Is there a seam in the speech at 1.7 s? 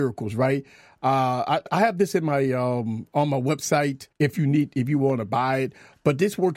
yes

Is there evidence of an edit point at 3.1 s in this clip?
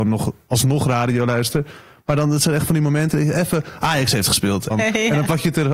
yes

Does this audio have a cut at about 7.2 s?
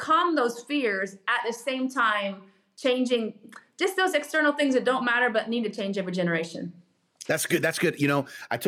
yes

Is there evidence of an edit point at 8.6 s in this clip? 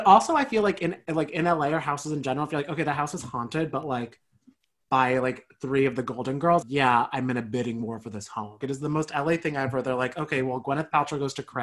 yes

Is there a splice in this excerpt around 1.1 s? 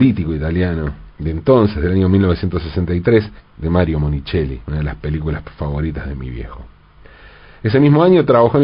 yes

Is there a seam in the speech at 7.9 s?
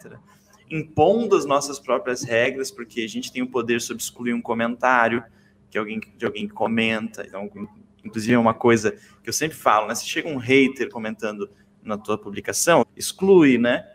no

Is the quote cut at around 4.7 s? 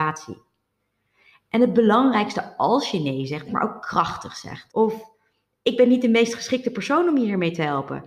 yes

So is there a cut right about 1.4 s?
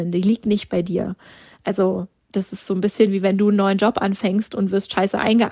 no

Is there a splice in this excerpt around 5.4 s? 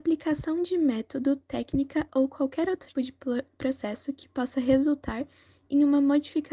no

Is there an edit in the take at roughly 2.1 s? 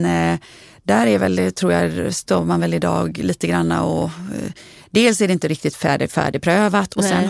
no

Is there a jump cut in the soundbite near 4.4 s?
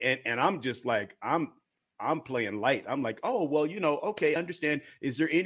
yes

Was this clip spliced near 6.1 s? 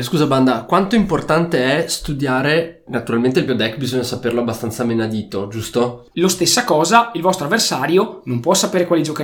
yes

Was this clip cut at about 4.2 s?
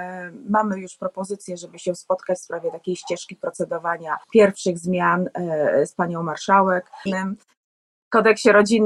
yes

